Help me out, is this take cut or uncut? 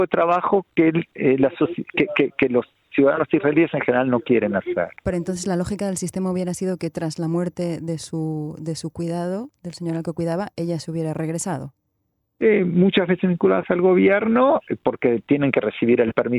cut